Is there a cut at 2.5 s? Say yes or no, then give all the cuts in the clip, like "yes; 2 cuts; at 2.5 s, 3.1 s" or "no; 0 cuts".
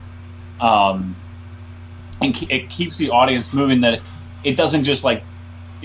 yes; 1 cut; at 2.5 s